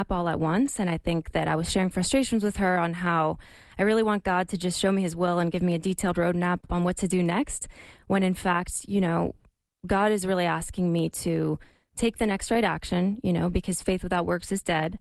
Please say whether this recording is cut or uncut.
uncut